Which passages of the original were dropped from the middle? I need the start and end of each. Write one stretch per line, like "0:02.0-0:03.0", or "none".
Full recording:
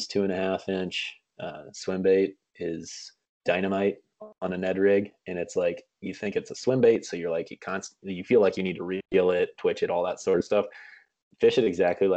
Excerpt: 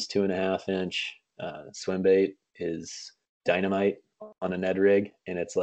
none